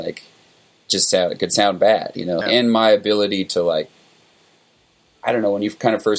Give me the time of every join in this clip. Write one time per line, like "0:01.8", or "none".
0:02.4